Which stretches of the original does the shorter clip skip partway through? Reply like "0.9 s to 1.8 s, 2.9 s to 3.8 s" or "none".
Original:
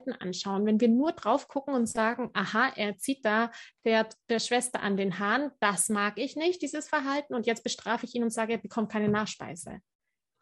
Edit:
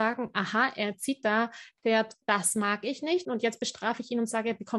4.2 s to 5.6 s, 6.6 s to 7.3 s